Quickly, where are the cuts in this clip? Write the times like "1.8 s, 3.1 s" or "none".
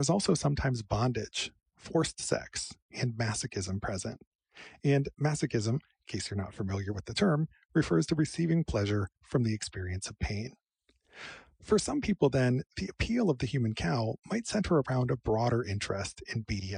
none